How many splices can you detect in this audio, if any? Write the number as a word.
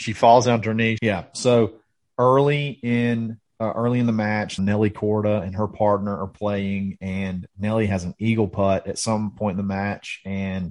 two